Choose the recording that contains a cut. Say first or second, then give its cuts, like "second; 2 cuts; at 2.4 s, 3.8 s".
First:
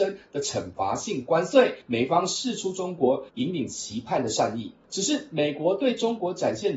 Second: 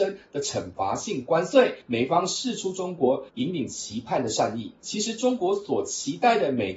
second; 1 cut; at 4.8 s